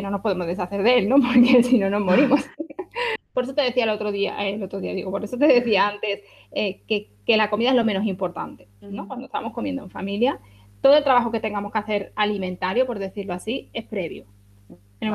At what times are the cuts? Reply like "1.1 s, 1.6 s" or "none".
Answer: 3.2 s